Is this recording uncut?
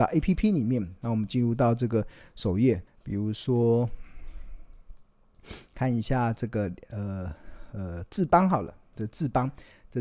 no; 1 cut; at 2.9 s

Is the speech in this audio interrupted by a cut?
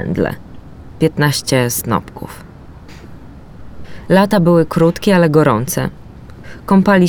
no; 0 cuts

